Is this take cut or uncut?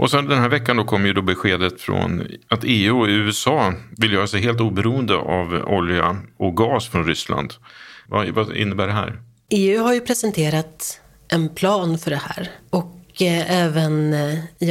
cut